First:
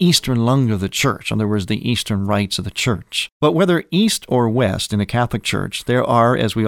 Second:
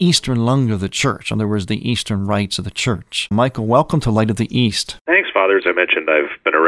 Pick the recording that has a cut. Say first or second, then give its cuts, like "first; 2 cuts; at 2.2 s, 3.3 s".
second; 2 cuts; at 3.3 s, 5.6 s